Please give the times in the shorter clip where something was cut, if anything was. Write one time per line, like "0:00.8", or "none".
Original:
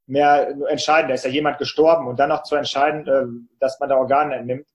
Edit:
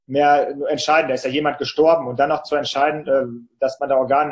none